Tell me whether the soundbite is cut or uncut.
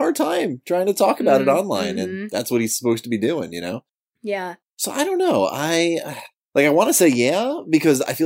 uncut